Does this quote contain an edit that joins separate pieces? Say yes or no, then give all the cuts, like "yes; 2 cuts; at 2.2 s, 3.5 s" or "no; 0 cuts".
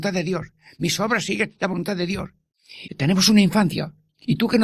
yes; 1 cut; at 2.9 s